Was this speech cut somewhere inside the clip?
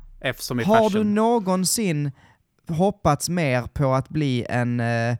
no; 0 cuts

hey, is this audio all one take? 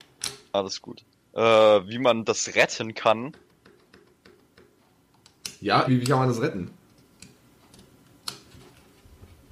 no; 1 cut; at 5.9 s

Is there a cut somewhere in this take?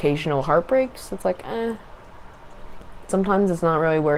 no; 0 cuts

